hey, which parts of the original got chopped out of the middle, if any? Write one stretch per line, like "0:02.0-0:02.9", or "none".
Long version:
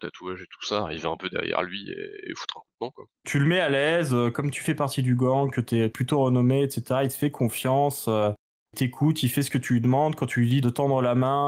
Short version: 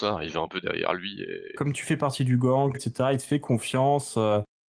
0:02.2-0:04.3
0:05.5-0:06.6